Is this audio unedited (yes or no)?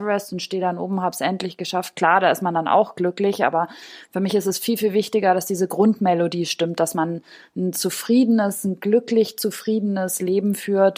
yes